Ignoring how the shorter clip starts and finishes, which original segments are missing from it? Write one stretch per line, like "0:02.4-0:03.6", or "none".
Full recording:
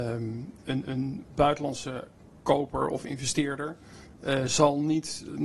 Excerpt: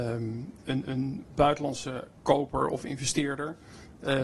0:02.2-0:02.4